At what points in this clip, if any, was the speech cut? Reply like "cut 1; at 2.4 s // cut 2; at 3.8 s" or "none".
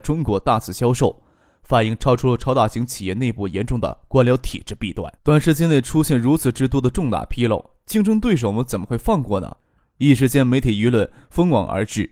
cut 1; at 5.2 s